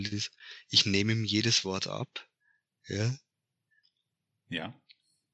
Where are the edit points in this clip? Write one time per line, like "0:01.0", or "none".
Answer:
none